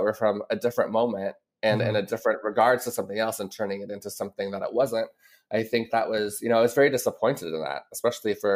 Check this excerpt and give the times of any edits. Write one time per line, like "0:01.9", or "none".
0:05.9